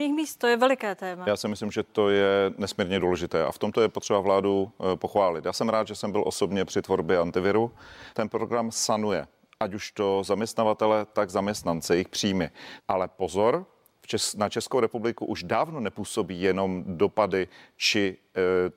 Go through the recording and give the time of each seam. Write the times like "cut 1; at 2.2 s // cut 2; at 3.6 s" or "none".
cut 1; at 8.1 s // cut 2; at 12.8 s